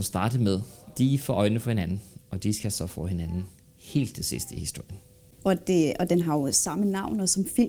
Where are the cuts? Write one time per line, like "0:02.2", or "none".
0:05.4